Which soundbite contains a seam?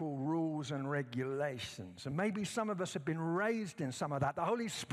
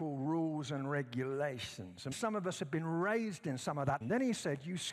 second; 2 cuts; at 2.1 s, 4.0 s

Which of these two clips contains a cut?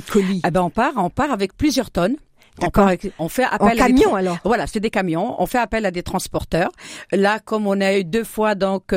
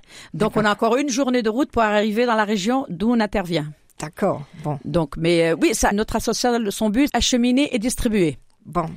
second; 2 cuts; at 5.9 s, 7.1 s

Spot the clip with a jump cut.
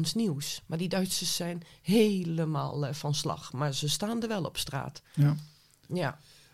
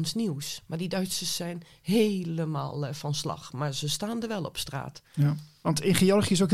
second; 1 cut; at 5.6 s

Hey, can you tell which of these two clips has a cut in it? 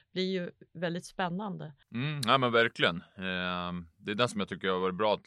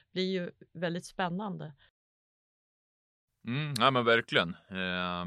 first; 1 cut; at 1.8 s

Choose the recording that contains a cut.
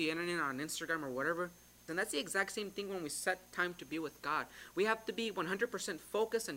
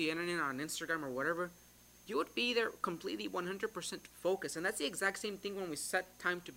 first; 1 cut; at 1.9 s

